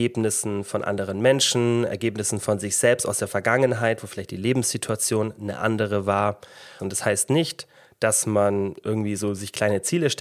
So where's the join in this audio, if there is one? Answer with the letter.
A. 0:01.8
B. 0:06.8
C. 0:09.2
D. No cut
B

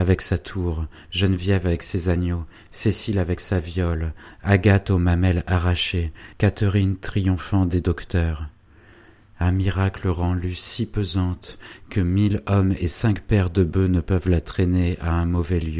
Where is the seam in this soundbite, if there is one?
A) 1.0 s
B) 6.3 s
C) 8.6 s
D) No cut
B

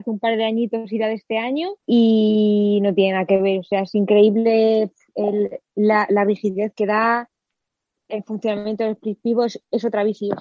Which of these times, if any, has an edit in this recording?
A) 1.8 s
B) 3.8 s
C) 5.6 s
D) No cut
A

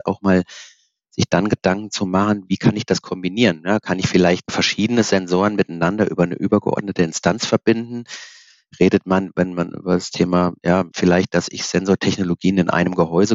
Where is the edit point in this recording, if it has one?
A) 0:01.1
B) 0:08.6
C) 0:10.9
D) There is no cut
C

